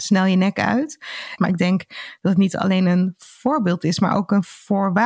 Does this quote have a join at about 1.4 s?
yes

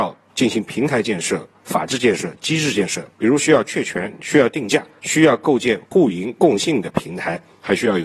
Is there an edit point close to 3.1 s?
yes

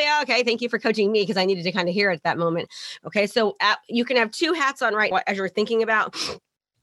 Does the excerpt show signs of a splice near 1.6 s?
no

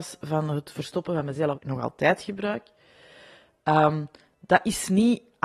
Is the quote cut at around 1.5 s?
yes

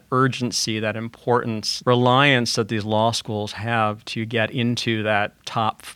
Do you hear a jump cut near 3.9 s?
no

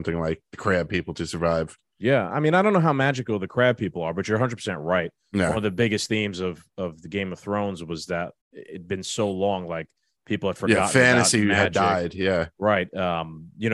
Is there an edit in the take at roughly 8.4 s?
yes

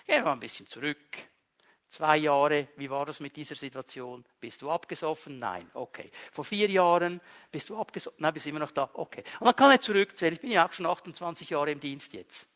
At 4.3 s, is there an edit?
no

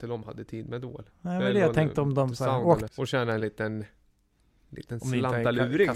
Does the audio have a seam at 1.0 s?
no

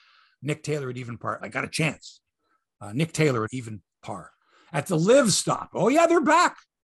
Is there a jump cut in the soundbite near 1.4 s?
yes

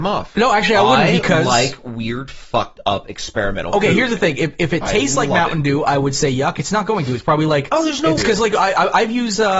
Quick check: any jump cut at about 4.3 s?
no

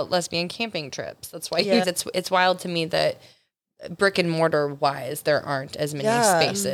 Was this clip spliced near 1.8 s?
yes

